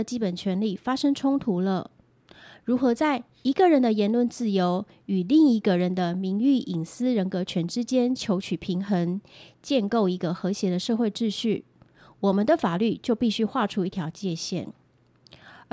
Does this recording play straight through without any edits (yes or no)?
yes